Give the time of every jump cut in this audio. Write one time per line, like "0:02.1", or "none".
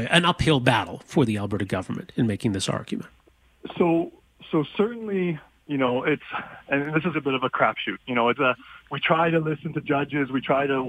0:07.1
0:08.4